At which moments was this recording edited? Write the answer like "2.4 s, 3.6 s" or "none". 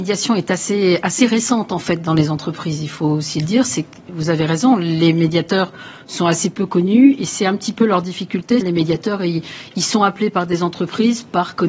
8.6 s